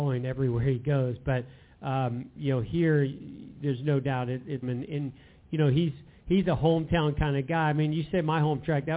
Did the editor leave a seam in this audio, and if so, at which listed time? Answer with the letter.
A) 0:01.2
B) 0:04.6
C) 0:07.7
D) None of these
B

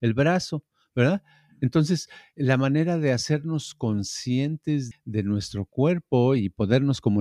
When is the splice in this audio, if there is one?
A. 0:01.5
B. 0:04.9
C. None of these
B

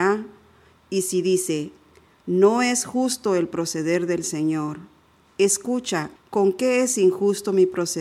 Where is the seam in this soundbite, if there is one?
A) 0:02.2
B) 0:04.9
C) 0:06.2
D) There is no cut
C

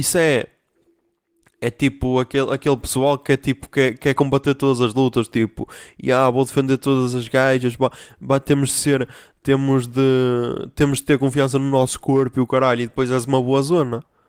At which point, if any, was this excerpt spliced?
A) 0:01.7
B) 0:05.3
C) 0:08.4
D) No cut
D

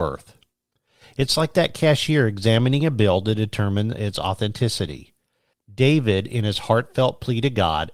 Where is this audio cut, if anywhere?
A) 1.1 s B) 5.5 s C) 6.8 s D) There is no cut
B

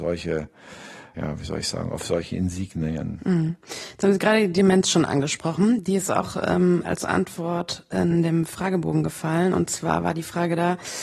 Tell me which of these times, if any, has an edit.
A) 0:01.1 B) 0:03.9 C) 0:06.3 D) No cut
A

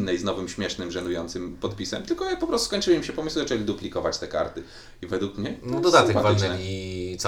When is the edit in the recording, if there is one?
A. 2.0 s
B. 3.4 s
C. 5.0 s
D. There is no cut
D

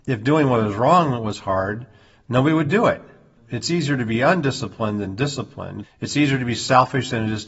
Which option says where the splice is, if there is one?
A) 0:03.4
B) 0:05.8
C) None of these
B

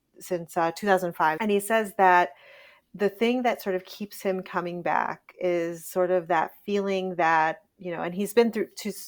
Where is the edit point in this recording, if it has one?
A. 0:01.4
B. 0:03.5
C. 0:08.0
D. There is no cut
A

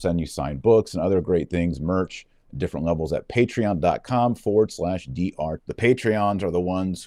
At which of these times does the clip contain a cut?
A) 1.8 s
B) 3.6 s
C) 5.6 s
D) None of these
C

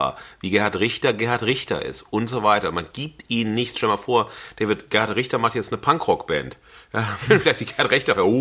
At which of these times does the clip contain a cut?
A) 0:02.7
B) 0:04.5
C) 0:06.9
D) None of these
D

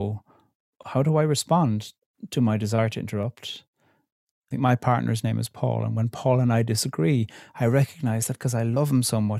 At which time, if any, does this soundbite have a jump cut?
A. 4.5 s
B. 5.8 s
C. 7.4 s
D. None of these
A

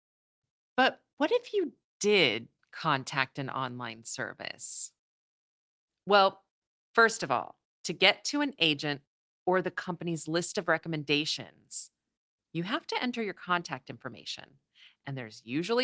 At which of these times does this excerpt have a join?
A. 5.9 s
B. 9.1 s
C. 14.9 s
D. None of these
A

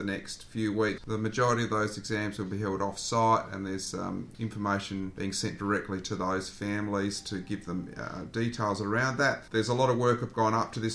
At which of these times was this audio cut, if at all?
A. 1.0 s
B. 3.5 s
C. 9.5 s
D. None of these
A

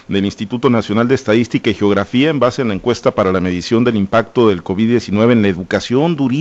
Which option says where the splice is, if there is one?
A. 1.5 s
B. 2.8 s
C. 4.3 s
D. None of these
D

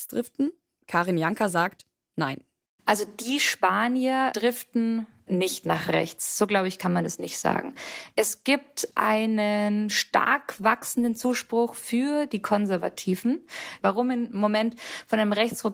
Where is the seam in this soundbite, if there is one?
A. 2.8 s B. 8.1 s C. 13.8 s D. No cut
C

